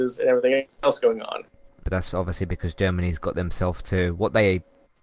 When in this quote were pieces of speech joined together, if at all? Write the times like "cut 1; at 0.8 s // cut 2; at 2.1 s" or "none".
cut 1; at 1.8 s